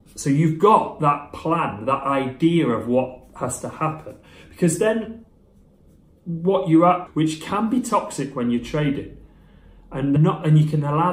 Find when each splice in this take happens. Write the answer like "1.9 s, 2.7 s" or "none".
7.1 s, 10.2 s